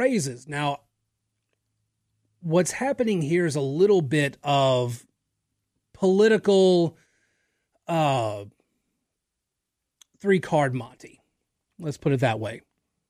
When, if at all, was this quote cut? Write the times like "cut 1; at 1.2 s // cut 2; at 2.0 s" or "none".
none